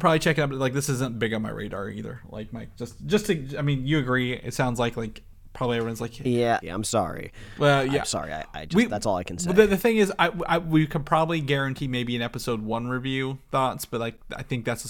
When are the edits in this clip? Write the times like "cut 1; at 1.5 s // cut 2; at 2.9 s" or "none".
cut 1; at 6.6 s